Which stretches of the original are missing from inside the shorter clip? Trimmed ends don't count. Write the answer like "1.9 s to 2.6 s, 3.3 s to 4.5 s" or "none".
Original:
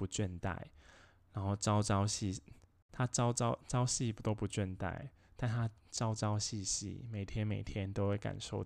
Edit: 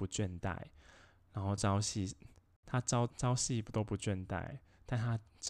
1.6 s to 1.8 s, 3.3 s to 3.6 s